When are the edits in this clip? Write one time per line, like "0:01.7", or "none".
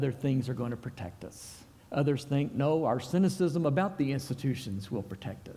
0:01.8